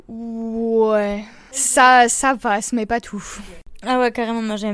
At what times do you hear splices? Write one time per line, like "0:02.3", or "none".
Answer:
none